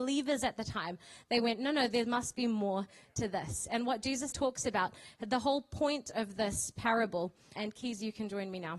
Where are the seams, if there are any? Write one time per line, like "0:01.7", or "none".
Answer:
0:04.3
0:07.6